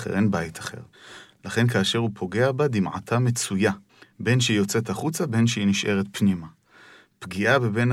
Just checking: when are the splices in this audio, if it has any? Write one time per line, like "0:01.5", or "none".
none